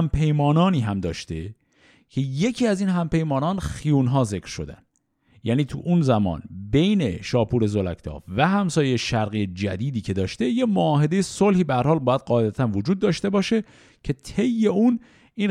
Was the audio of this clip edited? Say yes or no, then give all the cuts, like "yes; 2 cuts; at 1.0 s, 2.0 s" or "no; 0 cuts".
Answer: no; 0 cuts